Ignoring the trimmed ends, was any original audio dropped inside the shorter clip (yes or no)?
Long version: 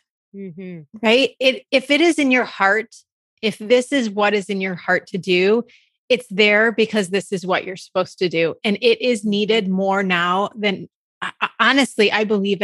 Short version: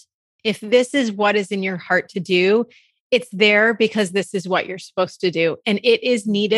no